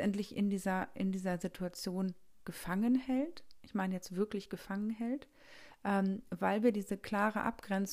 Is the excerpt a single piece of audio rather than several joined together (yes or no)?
yes